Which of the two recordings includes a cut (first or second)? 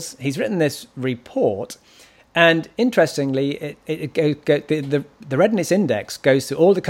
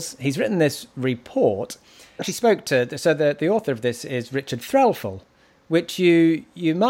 second